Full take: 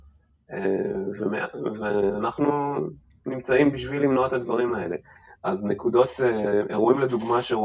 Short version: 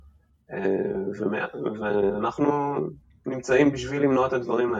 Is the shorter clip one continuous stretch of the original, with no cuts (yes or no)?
yes